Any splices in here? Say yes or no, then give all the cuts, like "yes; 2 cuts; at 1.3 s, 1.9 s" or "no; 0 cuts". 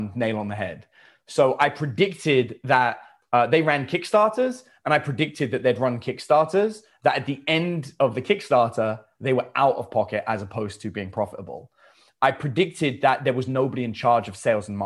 no; 0 cuts